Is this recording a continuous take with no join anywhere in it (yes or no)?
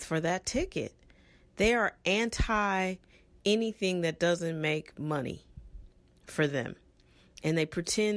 yes